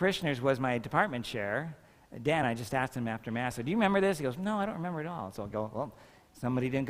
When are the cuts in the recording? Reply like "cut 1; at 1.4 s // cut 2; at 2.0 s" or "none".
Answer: none

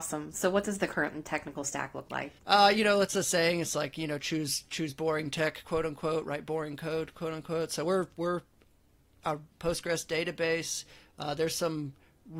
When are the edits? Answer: cut 1; at 2.4 s // cut 2; at 9.5 s

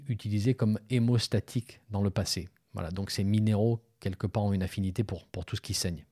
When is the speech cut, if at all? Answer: none

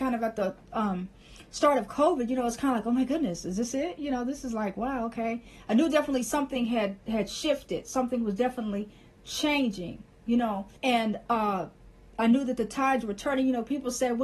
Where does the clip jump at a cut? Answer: cut 1; at 10.8 s

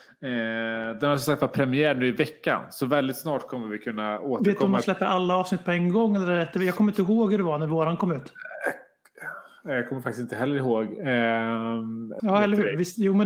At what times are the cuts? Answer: cut 1; at 12.2 s

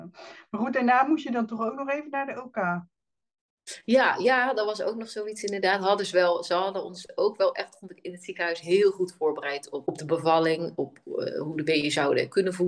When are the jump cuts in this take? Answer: cut 1; at 9.9 s

